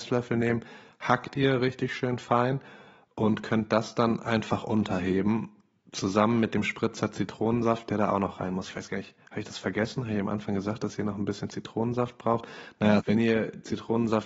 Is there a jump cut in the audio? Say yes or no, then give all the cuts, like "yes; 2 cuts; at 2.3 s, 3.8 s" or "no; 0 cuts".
yes; 1 cut; at 13.0 s